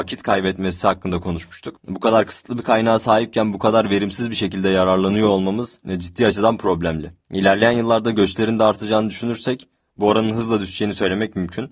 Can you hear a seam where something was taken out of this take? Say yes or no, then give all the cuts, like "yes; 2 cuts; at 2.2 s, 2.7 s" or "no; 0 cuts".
yes; 1 cut; at 1.8 s